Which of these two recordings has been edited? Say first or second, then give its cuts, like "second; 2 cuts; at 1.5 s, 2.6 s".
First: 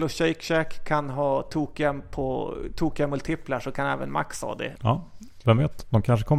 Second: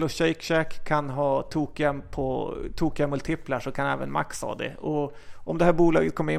first; 1 cut; at 4.7 s